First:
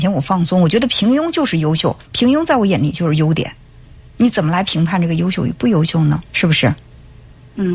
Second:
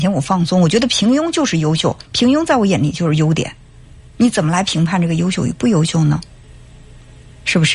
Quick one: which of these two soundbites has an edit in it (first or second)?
first